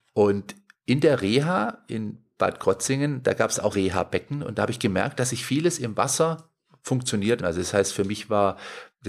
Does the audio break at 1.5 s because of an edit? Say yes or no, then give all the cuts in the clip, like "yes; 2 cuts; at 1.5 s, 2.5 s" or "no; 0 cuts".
no; 2 cuts; at 3.7 s, 7.4 s